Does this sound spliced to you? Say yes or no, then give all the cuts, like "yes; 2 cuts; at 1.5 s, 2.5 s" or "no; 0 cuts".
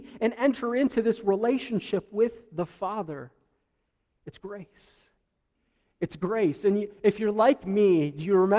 no; 0 cuts